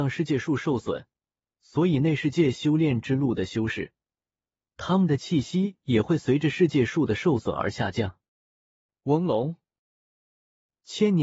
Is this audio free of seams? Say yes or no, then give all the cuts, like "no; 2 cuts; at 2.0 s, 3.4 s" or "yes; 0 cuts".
yes; 0 cuts